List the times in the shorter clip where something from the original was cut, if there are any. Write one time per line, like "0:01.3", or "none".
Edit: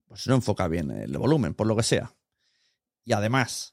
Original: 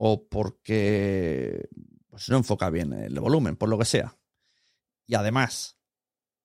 none